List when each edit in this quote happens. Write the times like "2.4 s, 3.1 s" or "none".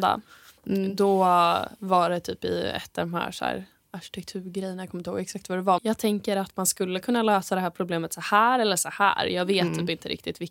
5.8 s